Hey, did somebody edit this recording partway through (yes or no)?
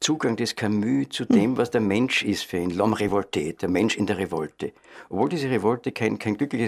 no